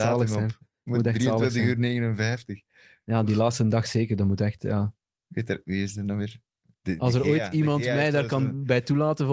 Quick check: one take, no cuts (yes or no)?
yes